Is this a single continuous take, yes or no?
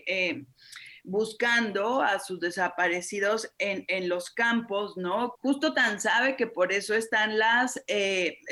no